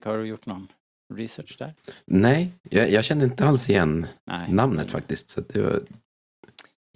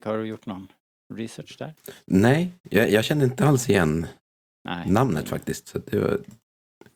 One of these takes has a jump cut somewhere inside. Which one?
first; 1 cut; at 4.2 s

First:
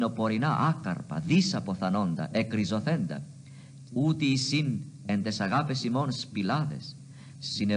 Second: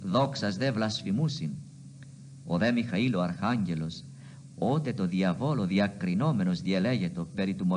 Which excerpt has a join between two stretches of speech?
first; 1 cut; at 3.9 s

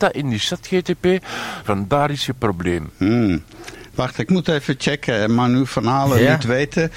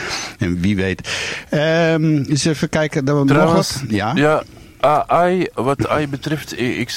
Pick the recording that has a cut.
first; 1 cut; at 1.6 s

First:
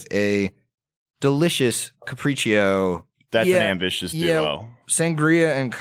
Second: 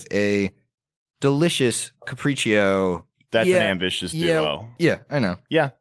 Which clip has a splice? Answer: second; 1 cut; at 4.8 s

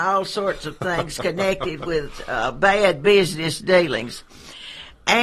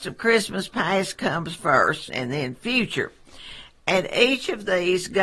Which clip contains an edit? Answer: second; 1 cut; at 2.1 s

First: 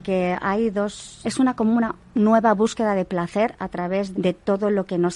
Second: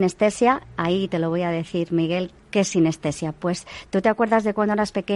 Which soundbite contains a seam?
first; 2 cuts; at 1.2 s, 4.1 s

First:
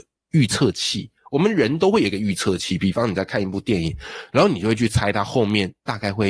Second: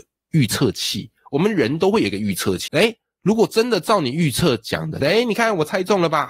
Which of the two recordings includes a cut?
second; 2 cuts; at 2.7 s, 5.0 s

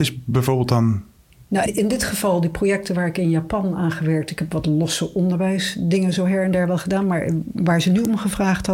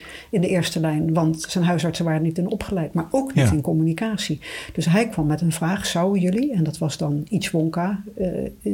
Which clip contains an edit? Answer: first; 1 cut; at 1.7 s

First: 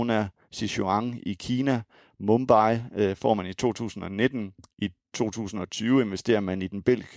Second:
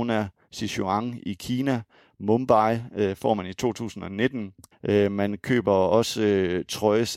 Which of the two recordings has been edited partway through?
second; 1 cut; at 4.7 s

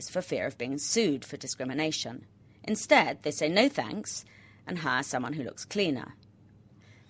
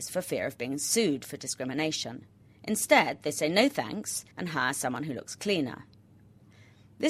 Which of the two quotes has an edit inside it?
second; 1 cut; at 4.3 s

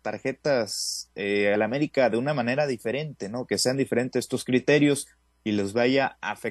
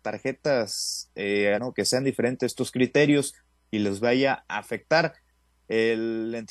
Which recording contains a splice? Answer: second; 1 cut; at 1.6 s

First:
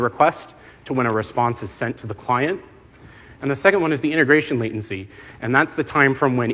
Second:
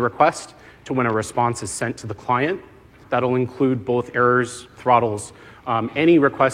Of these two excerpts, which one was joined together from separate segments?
second; 1 cut; at 3.0 s

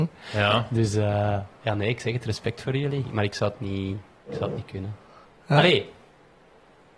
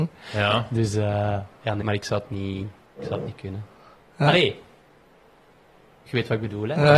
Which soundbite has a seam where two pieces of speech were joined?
second; 1 cut; at 1.8 s

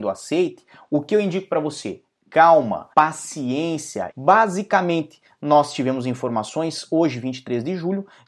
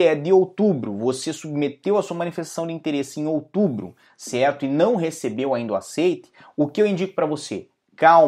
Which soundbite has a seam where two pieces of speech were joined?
first; 2 cuts; at 2.9 s, 4.1 s

